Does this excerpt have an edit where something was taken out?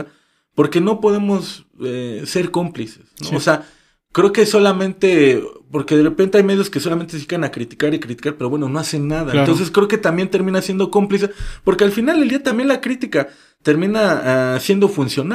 no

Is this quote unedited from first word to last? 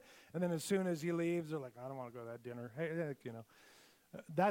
no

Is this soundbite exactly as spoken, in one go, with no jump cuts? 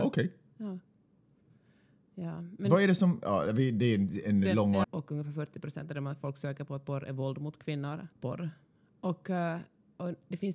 no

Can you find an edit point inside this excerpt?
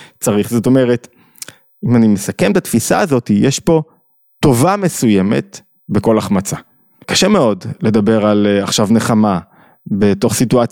yes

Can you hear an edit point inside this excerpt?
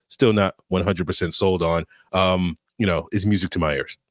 no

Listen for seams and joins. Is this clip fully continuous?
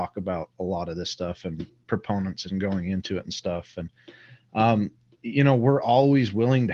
yes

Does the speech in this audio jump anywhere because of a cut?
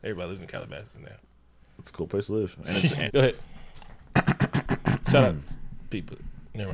yes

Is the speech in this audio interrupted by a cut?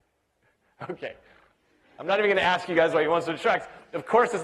no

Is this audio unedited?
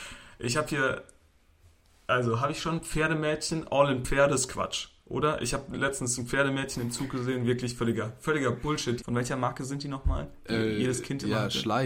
no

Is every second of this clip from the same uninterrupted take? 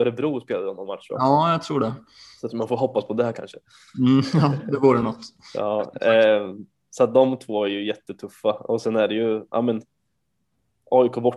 yes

